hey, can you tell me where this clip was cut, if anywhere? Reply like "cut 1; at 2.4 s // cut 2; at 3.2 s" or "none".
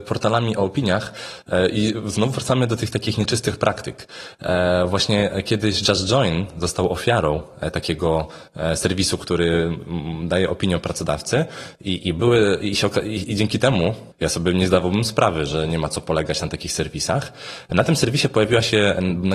cut 1; at 14.1 s